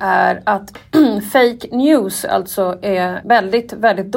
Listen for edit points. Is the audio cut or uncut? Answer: cut